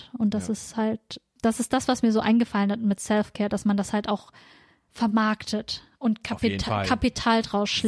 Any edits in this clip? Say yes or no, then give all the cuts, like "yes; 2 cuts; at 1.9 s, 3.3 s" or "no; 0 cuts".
no; 0 cuts